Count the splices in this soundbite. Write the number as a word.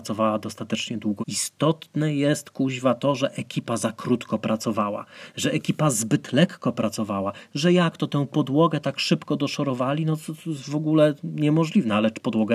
one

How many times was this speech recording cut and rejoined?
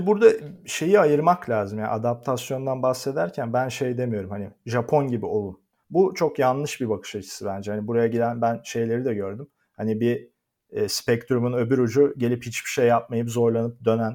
zero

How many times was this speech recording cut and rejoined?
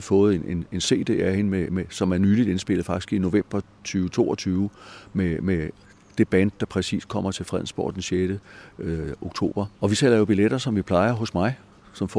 one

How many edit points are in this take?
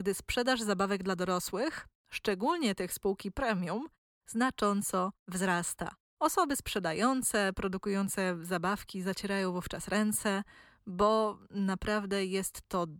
zero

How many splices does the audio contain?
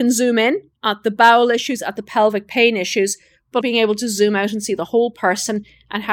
one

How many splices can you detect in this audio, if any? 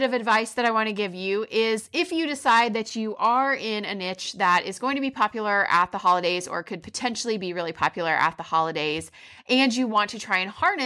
zero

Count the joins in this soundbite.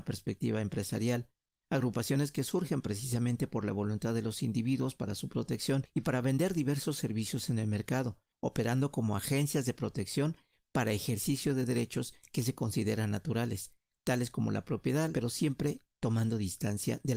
one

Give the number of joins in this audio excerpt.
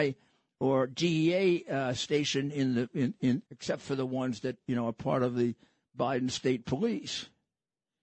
one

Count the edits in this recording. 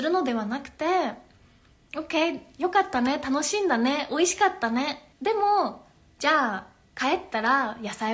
one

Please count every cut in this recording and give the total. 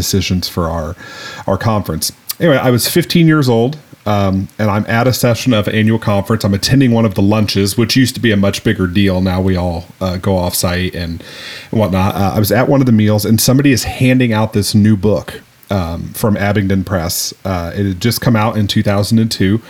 zero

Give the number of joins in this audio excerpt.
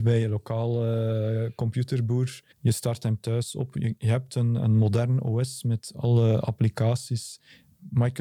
one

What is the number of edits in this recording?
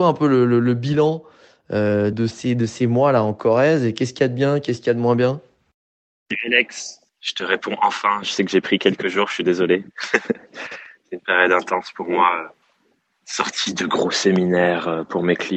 two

